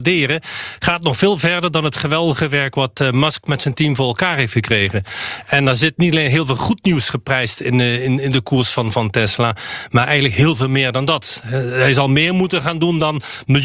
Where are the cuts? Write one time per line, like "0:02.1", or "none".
none